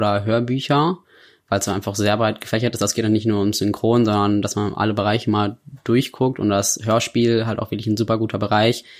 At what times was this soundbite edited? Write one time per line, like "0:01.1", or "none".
none